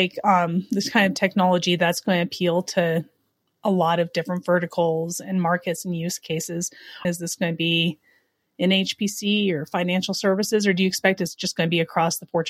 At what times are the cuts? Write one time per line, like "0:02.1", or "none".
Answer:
0:07.0